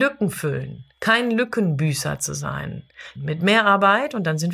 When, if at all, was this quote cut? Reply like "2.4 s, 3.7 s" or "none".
0.9 s, 3.2 s

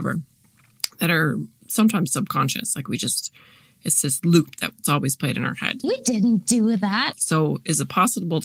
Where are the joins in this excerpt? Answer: 1.6 s, 5.8 s, 7.1 s

